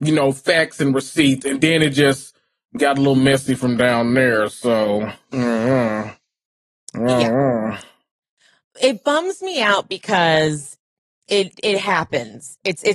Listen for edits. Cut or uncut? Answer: uncut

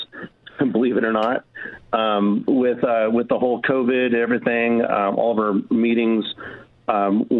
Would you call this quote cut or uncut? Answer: uncut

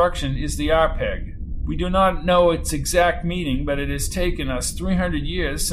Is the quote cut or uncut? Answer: uncut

